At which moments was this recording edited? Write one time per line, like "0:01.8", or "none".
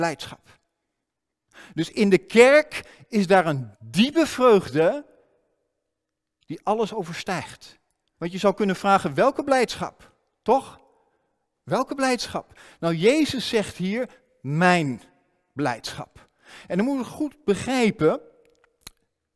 0:03.7
0:08.1